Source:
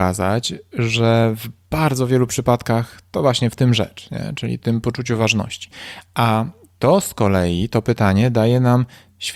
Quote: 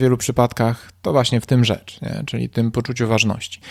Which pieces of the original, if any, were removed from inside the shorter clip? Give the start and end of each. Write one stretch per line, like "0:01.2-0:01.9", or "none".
none